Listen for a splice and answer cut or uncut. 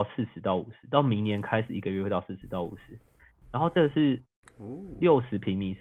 uncut